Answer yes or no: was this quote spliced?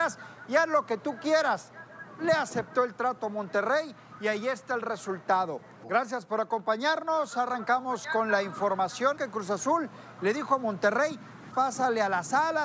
yes